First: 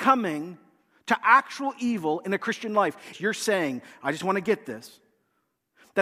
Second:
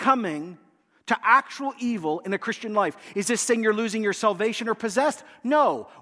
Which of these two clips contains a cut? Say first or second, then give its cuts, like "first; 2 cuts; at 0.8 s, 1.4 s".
first; 1 cut; at 3.1 s